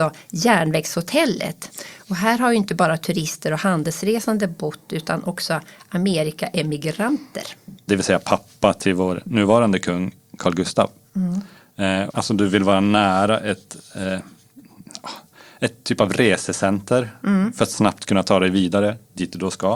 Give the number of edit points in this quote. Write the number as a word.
two